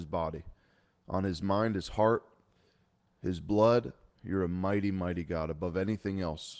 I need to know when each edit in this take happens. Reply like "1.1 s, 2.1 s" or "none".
4.1 s